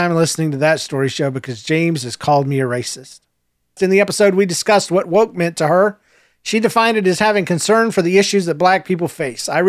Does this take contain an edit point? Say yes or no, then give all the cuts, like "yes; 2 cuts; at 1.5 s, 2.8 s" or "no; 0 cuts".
yes; 1 cut; at 3.8 s